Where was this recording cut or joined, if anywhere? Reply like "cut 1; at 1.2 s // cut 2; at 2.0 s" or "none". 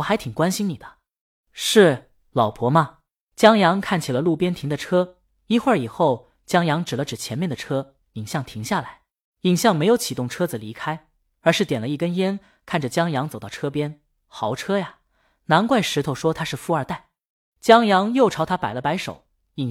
cut 1; at 9.3 s